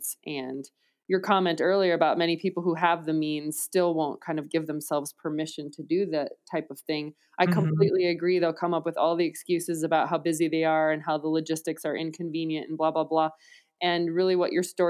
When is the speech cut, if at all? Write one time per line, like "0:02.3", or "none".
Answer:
none